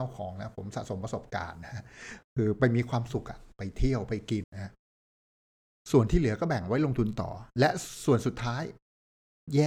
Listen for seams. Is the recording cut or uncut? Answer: cut